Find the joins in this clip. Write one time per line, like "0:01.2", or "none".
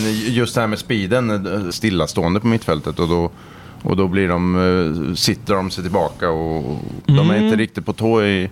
0:01.7
0:05.5
0:07.0